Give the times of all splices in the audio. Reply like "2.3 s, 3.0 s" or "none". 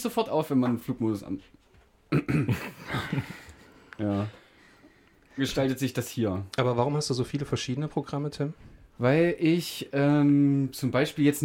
5.4 s